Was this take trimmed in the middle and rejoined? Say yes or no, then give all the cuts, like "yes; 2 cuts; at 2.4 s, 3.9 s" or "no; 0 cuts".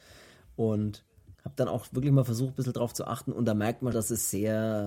yes; 2 cuts; at 1.3 s, 3.9 s